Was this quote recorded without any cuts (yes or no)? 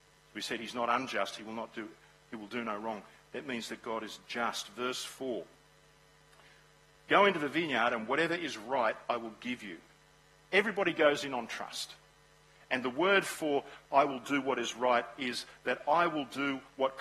yes